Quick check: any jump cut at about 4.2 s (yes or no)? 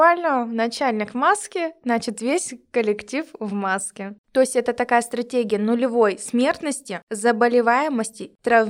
yes